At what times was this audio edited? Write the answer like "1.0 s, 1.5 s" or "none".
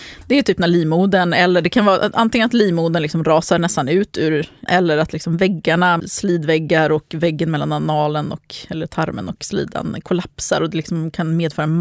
4.7 s, 6.0 s